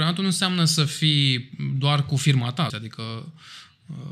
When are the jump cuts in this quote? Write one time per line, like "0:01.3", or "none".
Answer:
0:02.7